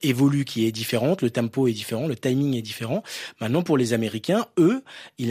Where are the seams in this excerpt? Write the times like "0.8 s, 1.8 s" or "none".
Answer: none